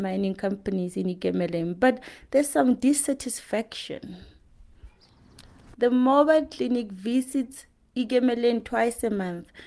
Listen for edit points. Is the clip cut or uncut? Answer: cut